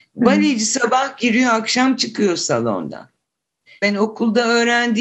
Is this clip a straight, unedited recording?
no; 1 cut; at 3.8 s

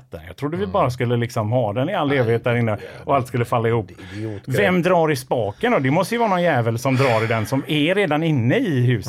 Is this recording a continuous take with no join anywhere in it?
yes; 0 cuts

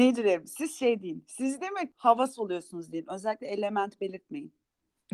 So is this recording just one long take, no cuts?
yes; 0 cuts

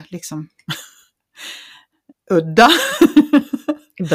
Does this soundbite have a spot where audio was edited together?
yes; 1 cut; at 2.1 s

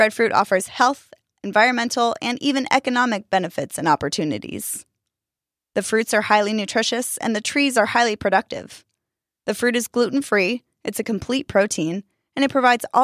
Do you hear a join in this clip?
no; 0 cuts

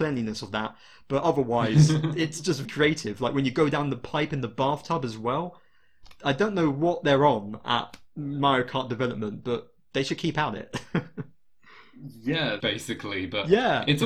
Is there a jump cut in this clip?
yes; 2 cuts; at 2.6 s, 12.6 s

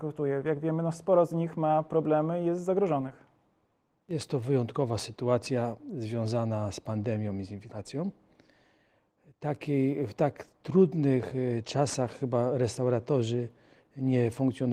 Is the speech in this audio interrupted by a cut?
no; 0 cuts

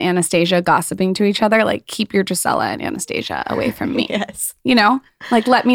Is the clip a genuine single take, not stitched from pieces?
yes; 0 cuts

